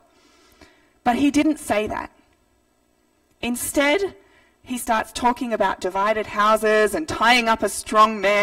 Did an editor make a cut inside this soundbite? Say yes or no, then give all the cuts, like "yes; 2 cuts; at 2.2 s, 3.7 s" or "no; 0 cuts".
no; 0 cuts